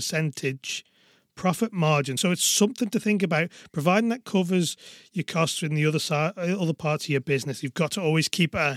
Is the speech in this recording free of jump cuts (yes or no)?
yes